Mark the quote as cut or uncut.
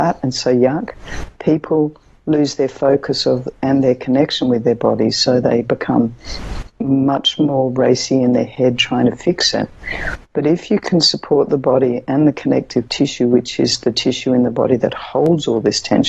uncut